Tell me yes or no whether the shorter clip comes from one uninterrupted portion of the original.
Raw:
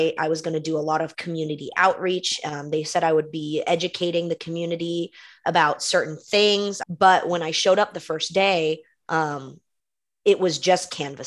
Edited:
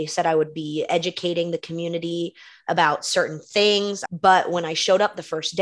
yes